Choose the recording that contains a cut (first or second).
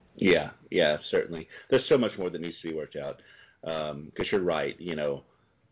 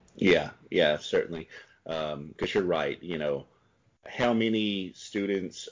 second